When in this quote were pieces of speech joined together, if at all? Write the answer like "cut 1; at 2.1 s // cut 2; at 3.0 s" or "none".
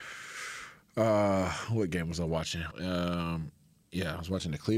cut 1; at 2.7 s

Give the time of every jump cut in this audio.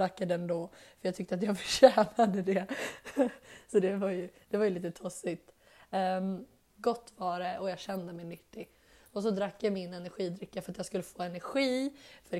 cut 1; at 6.7 s

